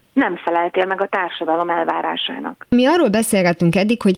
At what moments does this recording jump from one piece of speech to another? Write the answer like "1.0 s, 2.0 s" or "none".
none